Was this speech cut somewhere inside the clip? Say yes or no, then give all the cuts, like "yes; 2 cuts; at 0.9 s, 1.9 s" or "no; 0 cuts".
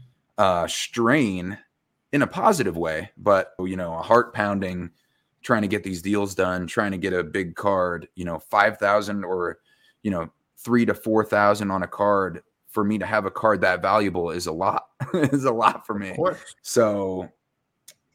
yes; 2 cuts; at 3.6 s, 16.6 s